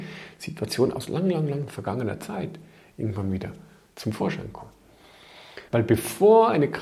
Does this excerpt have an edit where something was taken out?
yes; 1 cut; at 5.7 s

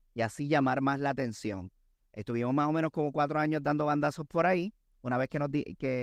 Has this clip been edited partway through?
no; 0 cuts

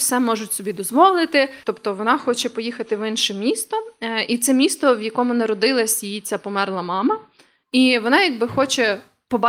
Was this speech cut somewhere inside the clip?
yes; 1 cut; at 1.6 s

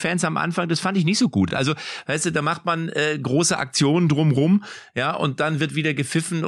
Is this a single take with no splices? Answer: yes; 0 cuts

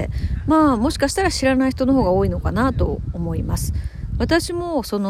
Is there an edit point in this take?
no; 0 cuts

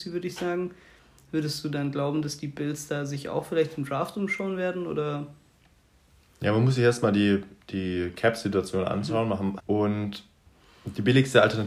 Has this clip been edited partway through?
yes; 1 cut; at 9.6 s

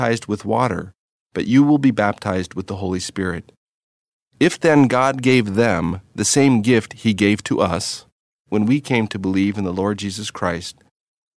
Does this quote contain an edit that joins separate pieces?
no; 0 cuts

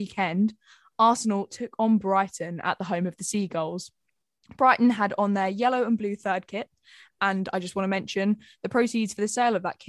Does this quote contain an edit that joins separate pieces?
no; 0 cuts

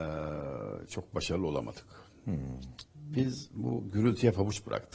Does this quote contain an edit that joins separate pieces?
yes; 1 cut; at 2.9 s

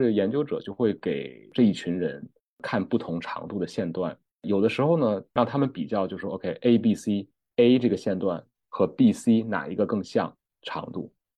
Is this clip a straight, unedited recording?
yes; 0 cuts

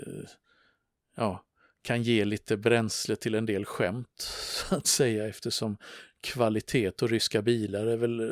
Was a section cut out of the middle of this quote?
no; 0 cuts

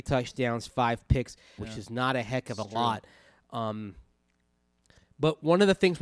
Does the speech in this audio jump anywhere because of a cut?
yes; 1 cut; at 1.6 s

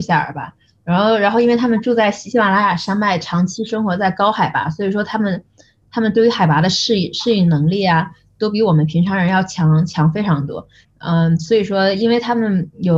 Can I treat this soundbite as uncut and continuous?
no; 1 cut; at 10.8 s

